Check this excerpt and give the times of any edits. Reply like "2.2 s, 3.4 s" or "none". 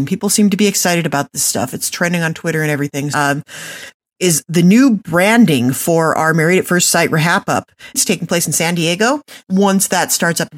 3.1 s, 7.9 s, 9.4 s